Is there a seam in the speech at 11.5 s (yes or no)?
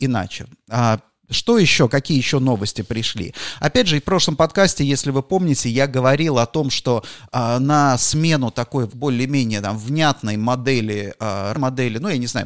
yes